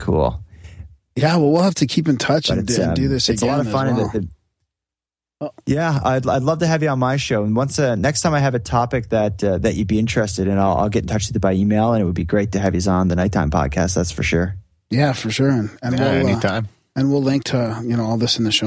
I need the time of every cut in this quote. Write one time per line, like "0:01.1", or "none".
none